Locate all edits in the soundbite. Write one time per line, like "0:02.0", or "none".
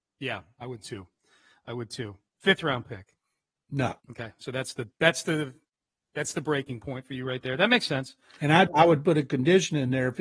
0:04.0
0:08.7